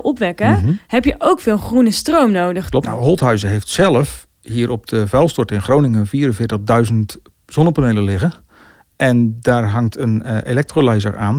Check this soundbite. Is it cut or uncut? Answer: cut